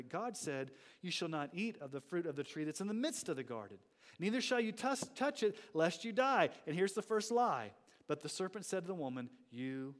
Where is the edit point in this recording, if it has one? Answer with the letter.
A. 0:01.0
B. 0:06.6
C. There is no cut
C